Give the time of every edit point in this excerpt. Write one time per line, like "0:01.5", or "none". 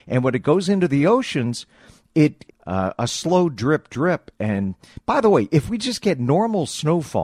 0:02.5
0:04.3